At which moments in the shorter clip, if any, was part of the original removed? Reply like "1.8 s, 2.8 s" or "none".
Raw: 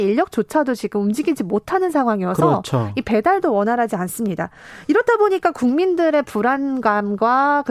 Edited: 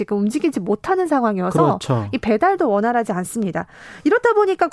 none